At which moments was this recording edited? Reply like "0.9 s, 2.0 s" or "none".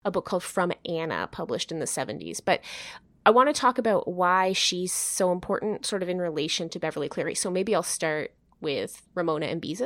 none